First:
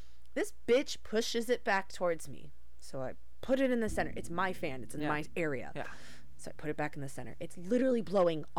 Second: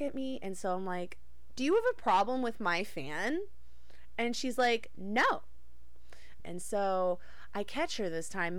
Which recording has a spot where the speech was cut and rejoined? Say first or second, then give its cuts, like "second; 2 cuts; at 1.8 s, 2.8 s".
second; 1 cut; at 6.4 s